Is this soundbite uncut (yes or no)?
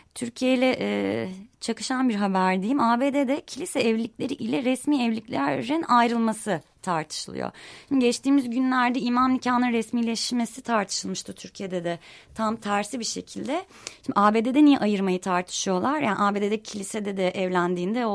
yes